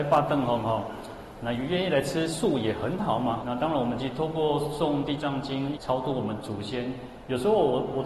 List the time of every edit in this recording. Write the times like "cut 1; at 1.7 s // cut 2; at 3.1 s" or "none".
cut 1; at 3.4 s // cut 2; at 5.7 s

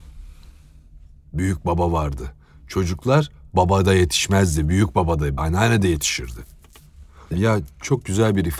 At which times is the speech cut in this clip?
cut 1; at 5.4 s // cut 2; at 7.3 s

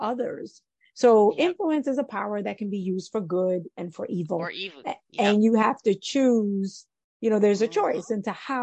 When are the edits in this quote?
none

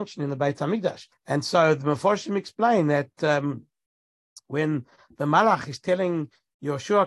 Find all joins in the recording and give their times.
cut 1; at 1.1 s

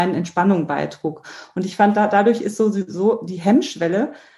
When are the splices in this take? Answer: none

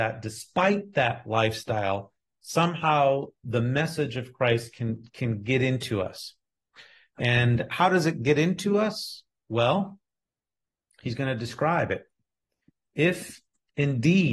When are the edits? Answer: none

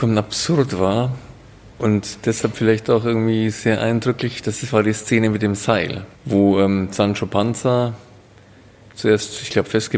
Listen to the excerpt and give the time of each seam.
cut 1; at 6.2 s

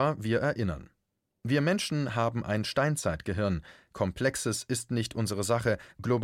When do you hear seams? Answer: none

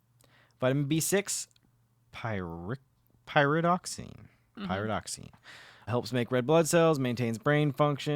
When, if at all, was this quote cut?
cut 1; at 5.9 s

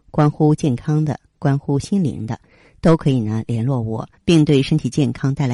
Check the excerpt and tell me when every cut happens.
cut 1; at 4.2 s

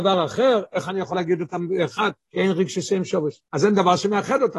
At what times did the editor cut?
cut 1; at 2.3 s // cut 2; at 3.4 s

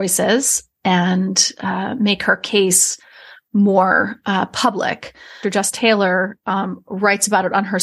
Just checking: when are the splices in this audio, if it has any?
cut 1; at 5.4 s

